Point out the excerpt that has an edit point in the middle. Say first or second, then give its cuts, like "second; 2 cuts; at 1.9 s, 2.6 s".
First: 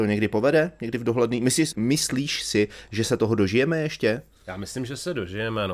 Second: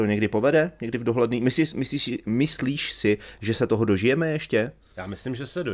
first; 1 cut; at 1.7 s